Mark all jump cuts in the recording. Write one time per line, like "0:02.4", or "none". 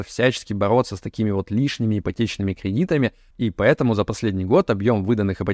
0:03.3